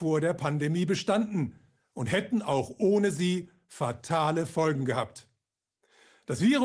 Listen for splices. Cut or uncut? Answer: uncut